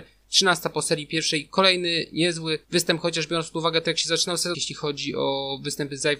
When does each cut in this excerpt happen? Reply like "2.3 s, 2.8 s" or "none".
2.6 s, 4.5 s